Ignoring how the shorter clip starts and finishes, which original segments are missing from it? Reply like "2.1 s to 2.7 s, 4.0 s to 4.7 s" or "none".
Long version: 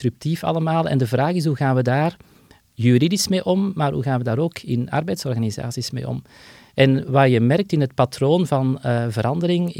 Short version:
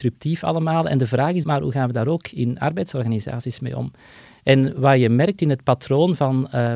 1.4 s to 3.7 s